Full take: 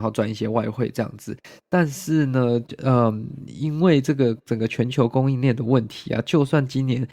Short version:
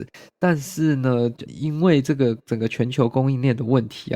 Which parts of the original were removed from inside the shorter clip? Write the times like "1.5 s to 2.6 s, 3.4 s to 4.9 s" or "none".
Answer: 2.8 s to 3.5 s